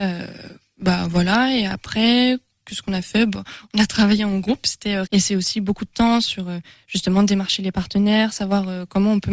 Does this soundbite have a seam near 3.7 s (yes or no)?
no